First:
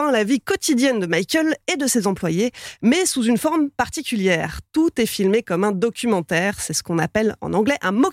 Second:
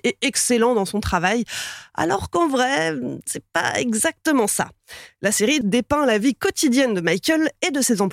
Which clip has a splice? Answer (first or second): second